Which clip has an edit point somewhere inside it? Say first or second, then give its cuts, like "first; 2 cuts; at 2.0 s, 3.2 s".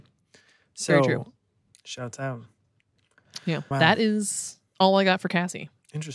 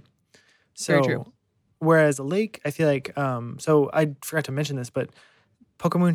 first; 2 cuts; at 1.7 s, 3.7 s